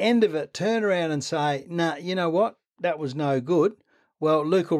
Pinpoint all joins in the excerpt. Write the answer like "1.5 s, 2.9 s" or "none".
none